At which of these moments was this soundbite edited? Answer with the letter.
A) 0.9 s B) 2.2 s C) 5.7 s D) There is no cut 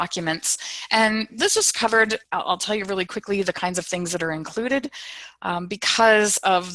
B